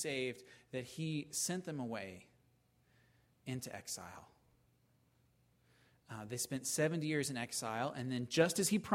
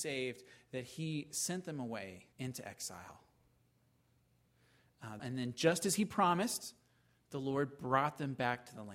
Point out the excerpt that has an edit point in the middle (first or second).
second